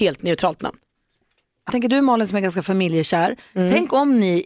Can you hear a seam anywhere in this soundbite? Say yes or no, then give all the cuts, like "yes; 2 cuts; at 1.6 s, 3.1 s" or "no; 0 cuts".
yes; 1 cut; at 1.7 s